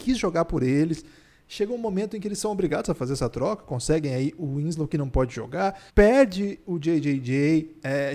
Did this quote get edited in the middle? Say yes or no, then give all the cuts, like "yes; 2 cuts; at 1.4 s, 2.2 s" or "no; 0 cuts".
yes; 1 cut; at 5.9 s